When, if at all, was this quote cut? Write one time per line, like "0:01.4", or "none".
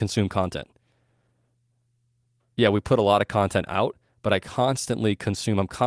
none